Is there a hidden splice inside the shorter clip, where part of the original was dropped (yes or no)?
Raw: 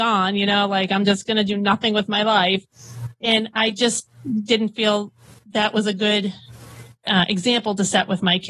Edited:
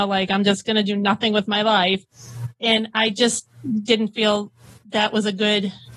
no